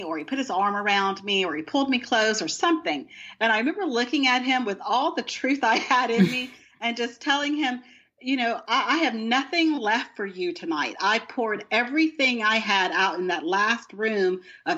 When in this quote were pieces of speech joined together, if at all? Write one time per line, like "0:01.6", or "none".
none